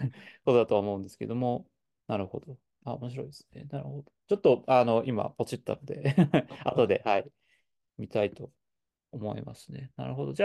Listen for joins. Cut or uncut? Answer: uncut